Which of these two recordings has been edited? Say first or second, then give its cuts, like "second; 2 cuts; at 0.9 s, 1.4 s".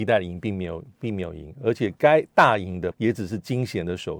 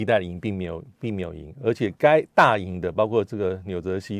first; 1 cut; at 2.9 s